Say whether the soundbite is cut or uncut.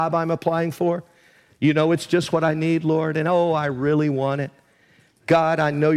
uncut